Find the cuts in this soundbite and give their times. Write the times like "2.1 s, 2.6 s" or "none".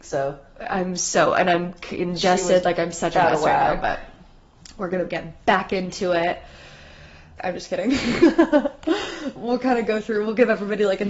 7.4 s, 9.4 s

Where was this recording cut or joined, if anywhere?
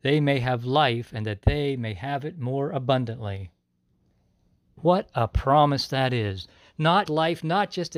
7.1 s

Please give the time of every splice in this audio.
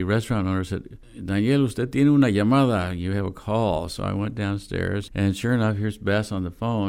none

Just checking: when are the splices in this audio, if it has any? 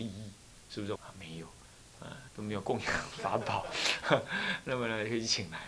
1.0 s, 2.3 s

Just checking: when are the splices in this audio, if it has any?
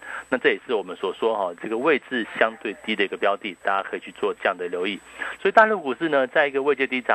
5.4 s

